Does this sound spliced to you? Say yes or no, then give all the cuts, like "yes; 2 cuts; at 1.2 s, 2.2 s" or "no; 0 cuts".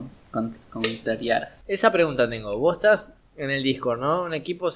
no; 0 cuts